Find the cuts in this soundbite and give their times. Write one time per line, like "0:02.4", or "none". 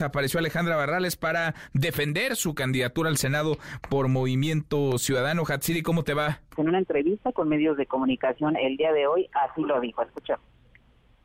0:06.6

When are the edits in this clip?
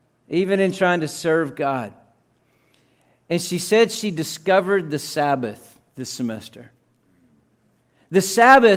none

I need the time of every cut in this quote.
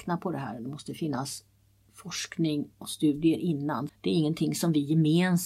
0:03.9

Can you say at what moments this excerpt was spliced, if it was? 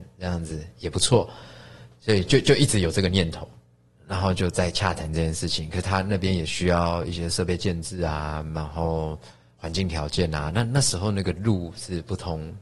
none

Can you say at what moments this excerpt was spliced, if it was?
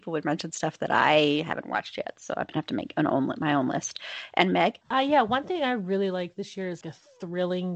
0:04.8
0:06.8

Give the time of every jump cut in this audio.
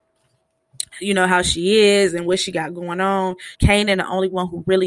0:03.5

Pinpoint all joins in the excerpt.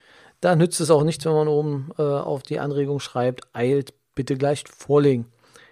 none

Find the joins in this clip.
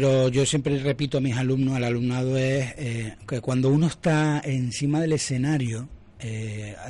none

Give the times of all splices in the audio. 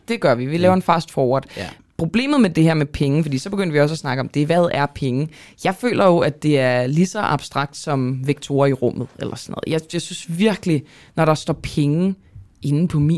none

